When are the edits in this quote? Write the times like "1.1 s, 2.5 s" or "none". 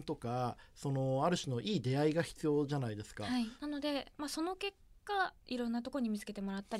3.6 s, 5.4 s